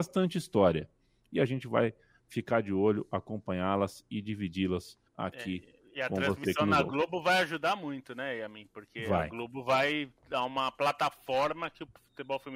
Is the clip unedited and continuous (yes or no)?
no